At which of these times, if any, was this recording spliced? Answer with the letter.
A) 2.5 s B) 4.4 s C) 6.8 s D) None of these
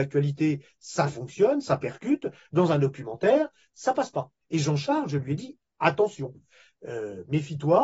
B